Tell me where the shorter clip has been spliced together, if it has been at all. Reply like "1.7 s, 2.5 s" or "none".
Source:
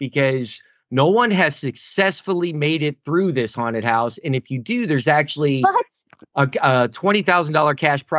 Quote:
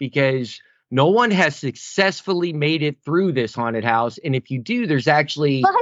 none